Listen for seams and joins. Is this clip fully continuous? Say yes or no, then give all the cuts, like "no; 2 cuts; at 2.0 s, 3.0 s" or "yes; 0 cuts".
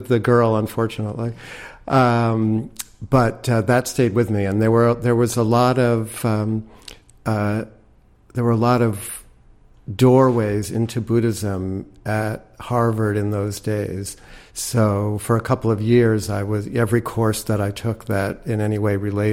yes; 0 cuts